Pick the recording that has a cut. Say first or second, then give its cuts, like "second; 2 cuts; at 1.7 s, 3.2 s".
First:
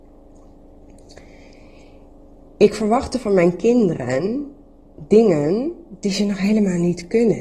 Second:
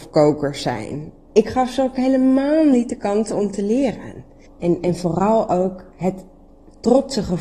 second; 2 cuts; at 1.3 s, 4.5 s